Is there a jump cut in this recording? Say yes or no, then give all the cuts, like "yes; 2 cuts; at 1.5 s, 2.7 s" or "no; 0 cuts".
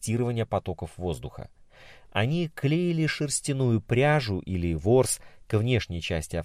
no; 0 cuts